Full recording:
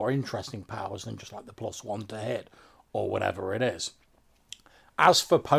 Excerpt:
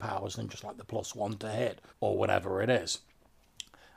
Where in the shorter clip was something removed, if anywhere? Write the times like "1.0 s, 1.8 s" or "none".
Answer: 1.9 s